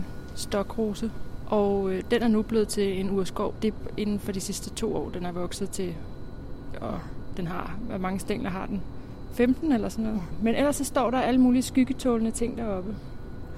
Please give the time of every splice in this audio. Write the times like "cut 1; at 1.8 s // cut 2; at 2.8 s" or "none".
cut 1; at 6.7 s